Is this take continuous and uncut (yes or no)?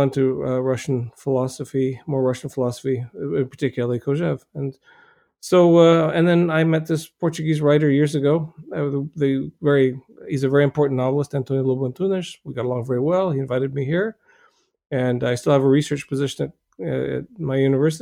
yes